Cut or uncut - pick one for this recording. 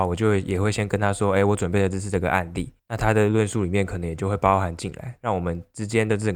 uncut